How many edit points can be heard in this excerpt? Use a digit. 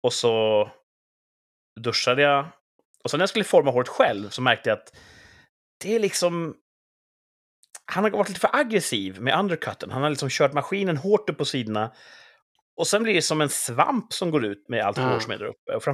1